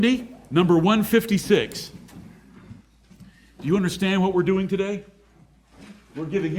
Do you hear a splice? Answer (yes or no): no